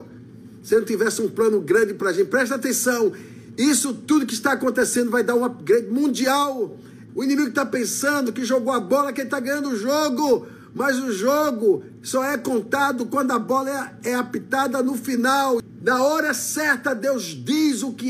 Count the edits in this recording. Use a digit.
1